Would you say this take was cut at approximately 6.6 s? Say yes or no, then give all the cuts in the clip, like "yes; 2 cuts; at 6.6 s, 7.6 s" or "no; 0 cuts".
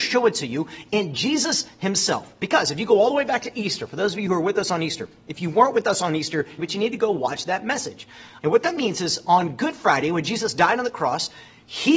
yes; 2 cuts; at 6.6 s, 8.4 s